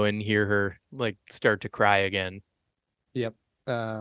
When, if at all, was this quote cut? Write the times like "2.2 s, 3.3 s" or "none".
none